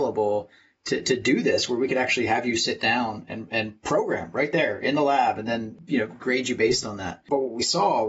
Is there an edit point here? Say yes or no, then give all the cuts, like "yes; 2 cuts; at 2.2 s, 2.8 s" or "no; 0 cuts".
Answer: no; 0 cuts